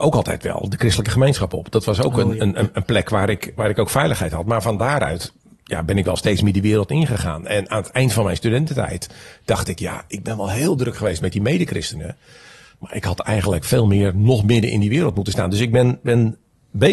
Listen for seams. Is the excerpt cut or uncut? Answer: uncut